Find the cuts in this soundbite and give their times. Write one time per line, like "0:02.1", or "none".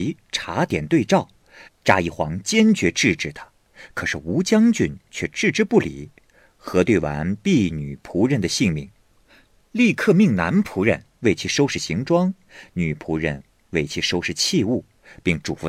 0:01.7